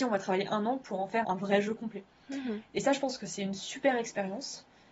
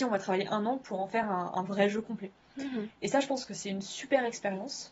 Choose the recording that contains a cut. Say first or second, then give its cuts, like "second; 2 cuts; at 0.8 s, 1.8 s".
first; 1 cut; at 1.2 s